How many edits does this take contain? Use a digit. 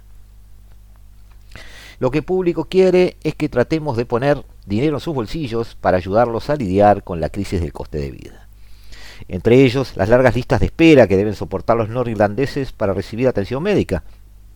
2